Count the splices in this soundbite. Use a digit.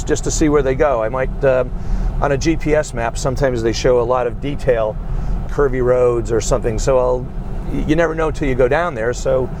1